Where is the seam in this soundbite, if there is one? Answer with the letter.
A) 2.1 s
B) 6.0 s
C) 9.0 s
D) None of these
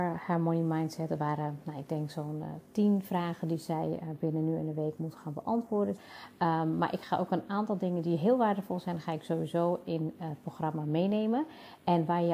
B